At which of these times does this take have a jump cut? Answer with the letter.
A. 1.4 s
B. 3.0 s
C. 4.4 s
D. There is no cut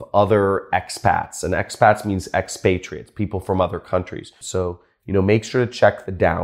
C